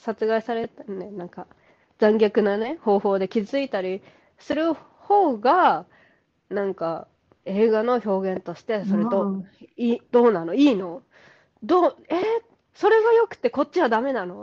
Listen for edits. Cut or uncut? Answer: uncut